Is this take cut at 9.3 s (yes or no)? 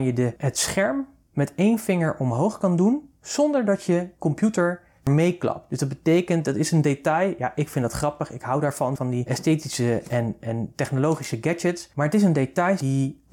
yes